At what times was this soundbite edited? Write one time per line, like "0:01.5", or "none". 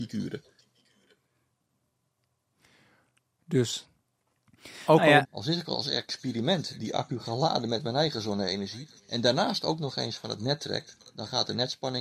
0:05.2
0:09.0